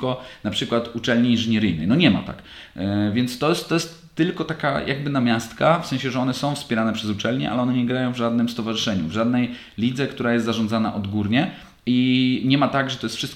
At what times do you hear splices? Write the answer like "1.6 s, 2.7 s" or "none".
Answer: none